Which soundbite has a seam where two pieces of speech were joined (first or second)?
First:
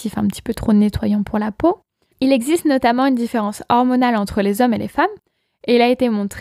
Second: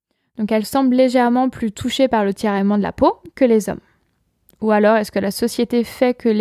first